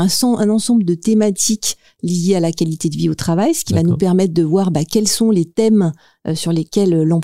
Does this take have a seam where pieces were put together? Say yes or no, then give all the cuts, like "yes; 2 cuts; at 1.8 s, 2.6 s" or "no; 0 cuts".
no; 0 cuts